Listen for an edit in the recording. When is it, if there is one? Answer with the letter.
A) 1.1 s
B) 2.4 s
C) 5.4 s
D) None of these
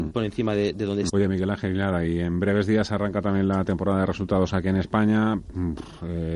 A